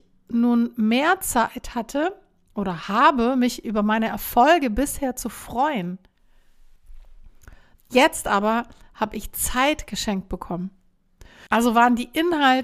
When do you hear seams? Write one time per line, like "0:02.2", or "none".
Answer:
0:07.7
0:11.5